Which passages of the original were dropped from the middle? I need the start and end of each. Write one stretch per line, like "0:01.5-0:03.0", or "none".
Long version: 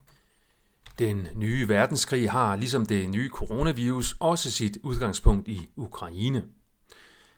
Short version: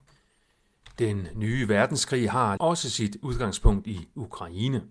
0:02.6-0:04.2